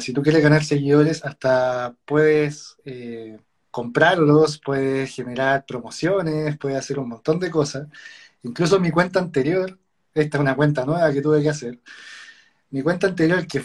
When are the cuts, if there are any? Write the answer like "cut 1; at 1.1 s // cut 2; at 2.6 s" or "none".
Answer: none